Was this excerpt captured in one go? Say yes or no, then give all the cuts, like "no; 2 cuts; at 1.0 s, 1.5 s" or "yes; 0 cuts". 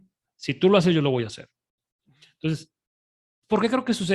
yes; 0 cuts